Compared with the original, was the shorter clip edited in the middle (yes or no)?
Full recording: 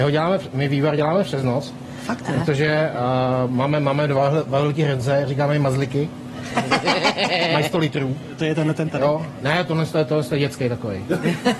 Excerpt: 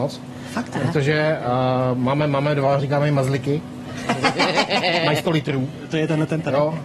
yes